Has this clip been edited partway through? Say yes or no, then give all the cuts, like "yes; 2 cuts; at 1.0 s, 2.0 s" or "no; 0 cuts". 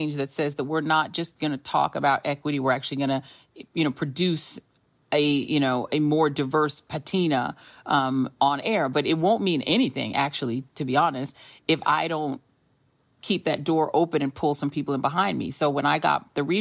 no; 0 cuts